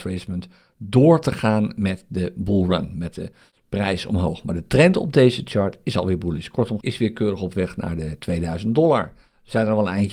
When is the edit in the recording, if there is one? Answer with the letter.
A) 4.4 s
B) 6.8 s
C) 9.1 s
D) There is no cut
B